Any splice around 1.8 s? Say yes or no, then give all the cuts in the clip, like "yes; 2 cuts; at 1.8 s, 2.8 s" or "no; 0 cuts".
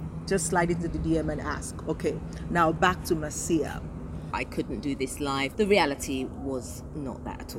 no; 2 cuts; at 4.3 s, 5.5 s